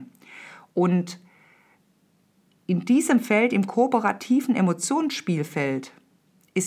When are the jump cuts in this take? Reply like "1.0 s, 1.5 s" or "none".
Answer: none